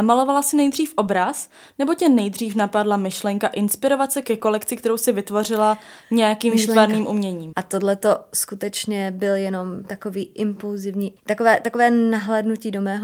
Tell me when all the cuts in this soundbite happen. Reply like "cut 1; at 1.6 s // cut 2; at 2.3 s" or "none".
cut 1; at 7.5 s // cut 2; at 11.2 s